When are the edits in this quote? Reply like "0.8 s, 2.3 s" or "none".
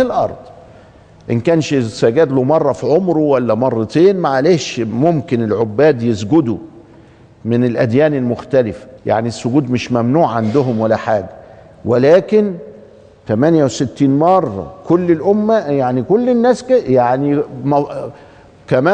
9.0 s